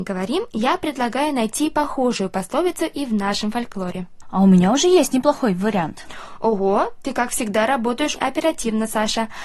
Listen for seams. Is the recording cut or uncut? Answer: cut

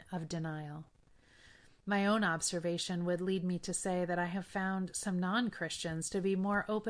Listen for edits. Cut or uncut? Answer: uncut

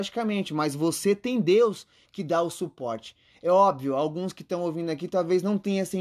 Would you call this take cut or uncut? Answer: uncut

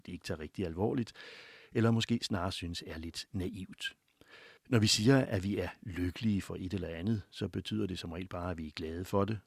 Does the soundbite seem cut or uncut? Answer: cut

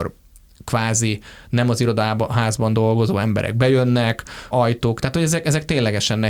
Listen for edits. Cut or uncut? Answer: cut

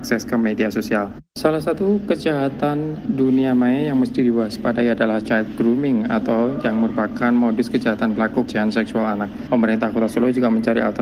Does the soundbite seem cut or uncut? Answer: cut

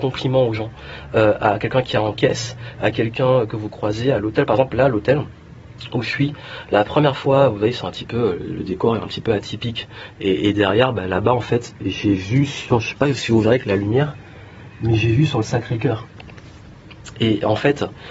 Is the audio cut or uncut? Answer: uncut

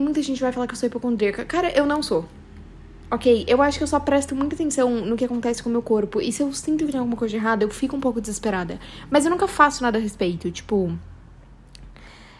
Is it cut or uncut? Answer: uncut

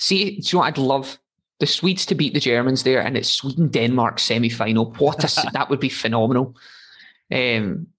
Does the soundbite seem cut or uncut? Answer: uncut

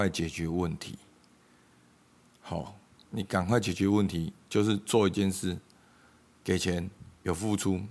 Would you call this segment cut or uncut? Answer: uncut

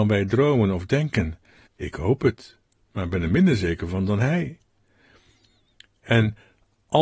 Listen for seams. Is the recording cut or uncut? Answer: cut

